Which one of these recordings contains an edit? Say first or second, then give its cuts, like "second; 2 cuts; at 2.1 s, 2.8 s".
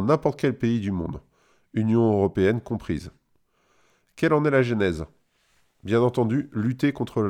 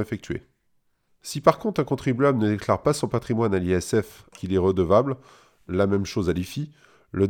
second; 2 cuts; at 1.1 s, 4.3 s